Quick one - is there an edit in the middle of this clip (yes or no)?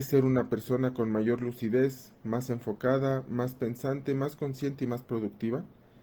no